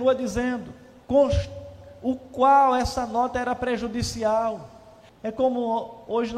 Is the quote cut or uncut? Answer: cut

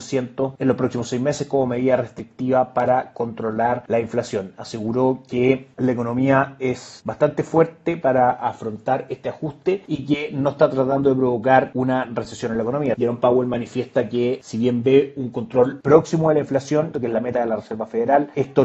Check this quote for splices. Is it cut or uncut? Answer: cut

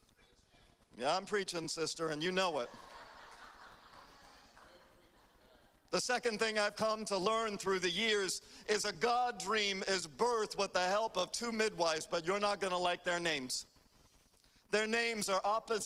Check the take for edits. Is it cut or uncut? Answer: uncut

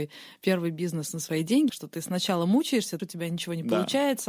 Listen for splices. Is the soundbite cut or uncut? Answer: cut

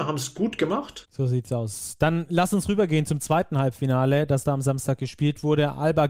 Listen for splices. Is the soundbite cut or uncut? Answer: cut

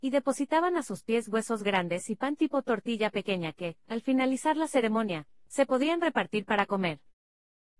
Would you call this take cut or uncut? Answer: uncut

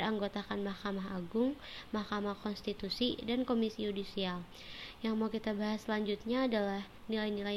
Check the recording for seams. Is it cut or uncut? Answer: uncut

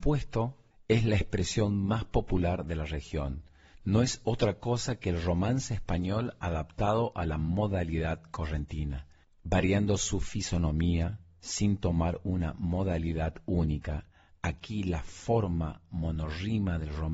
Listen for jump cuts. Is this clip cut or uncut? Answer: uncut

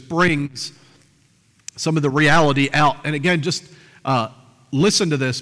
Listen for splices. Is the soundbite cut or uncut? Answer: uncut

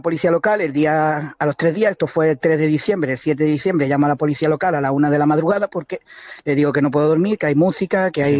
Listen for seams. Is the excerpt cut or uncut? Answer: uncut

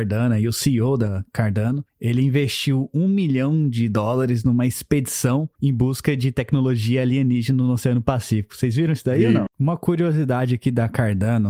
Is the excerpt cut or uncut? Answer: cut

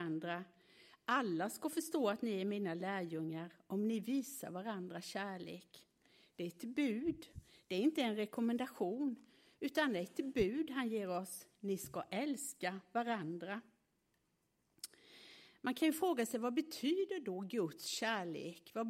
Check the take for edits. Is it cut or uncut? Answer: uncut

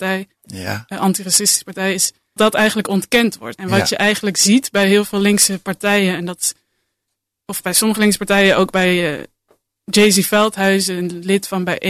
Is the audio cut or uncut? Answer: cut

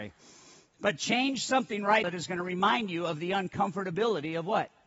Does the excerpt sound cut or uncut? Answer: cut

